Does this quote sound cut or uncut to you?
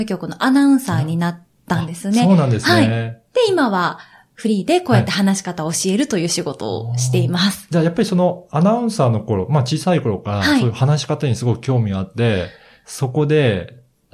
uncut